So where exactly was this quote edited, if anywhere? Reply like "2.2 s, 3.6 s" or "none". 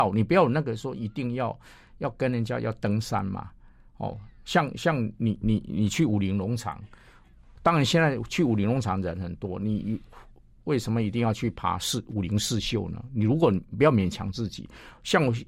none